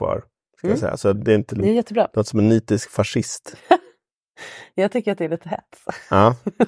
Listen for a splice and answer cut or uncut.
cut